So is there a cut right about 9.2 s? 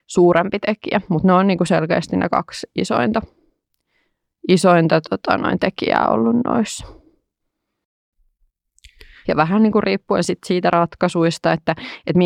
yes; 1 cut; at 9.2 s

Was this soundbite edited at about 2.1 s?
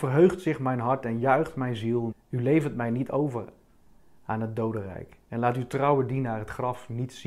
yes; 1 cut; at 2.1 s

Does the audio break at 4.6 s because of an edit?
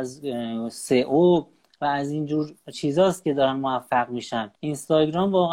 yes; 1 cut; at 4.6 s

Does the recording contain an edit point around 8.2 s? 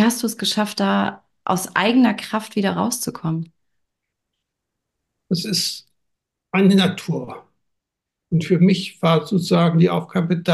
yes; 1 cut; at 8.2 s

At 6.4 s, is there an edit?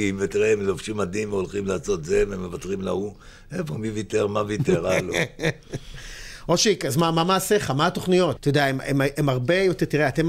no; 1 cut; at 8.4 s

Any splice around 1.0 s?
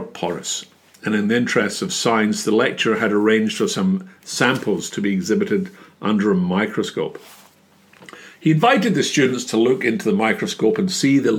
no; 0 cuts

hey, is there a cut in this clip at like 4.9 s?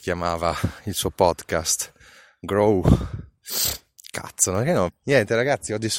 yes; 1 cut; at 4.9 s

